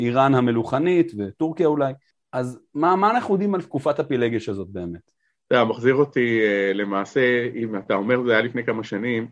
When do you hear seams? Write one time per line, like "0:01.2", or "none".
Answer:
none